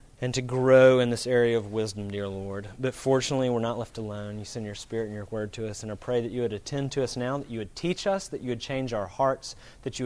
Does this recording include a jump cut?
no; 0 cuts

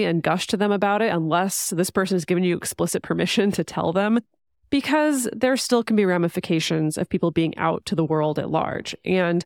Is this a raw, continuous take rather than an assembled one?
yes; 0 cuts

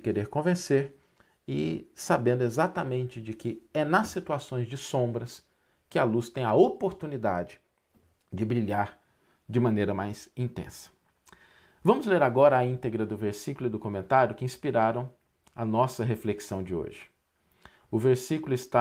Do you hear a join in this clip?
no; 0 cuts

